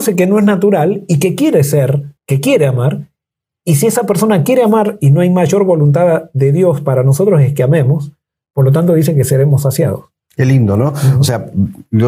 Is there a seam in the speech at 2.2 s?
yes; 1 cut; at 2.2 s

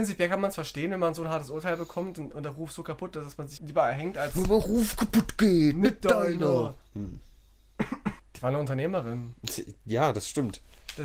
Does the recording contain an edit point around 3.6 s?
yes; 3 cuts; at 3.6 s, 6.8 s, 8.2 s

